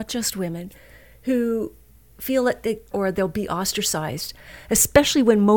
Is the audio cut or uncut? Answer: cut